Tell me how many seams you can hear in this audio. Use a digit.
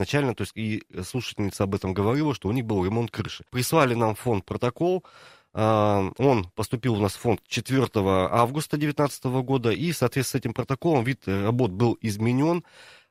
1